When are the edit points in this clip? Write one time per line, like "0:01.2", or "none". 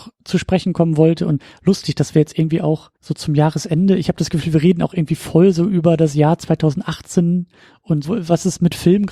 0:03.0
0:08.0

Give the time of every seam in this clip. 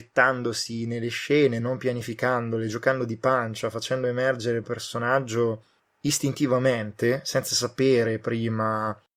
0:01.6
0:04.6

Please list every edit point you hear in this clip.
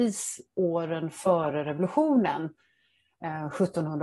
none

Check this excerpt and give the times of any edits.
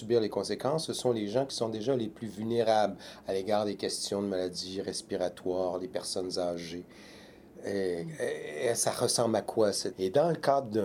0:07.5
0:09.9

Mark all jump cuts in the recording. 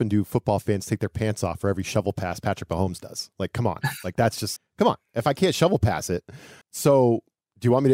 0:04.6
0:06.6

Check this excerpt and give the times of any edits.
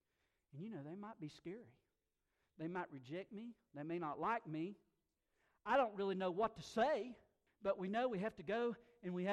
0:07.5

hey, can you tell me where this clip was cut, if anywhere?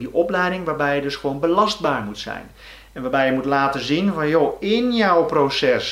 none

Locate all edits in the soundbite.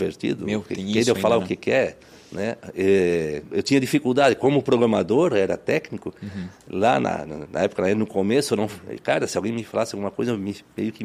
0:03.5

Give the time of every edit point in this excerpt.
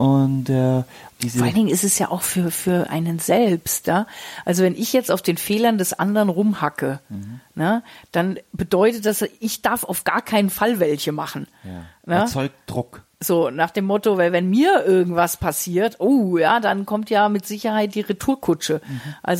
0:01.1

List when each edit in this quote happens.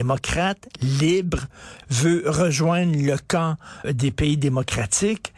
0:01.8
0:03.8

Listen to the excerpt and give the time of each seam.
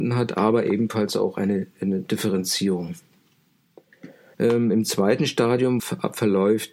0:04.3
0:05.8

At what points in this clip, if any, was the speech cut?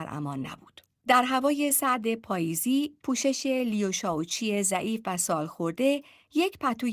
0:01.0

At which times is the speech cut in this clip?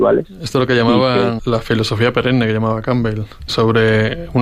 0:01.4
0:03.5

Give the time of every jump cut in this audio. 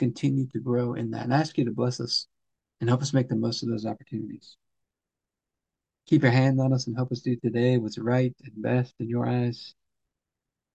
0:02.7

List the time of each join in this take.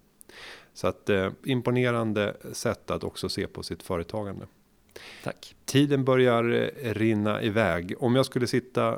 0:01.4

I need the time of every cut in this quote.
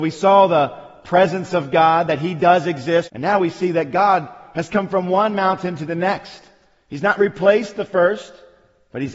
0:03.1

